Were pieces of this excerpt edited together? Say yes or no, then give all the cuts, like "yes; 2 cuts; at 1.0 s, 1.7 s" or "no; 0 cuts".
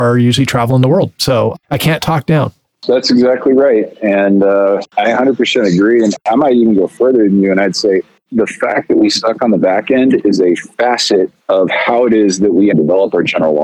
yes; 2 cuts; at 11.4 s, 12.7 s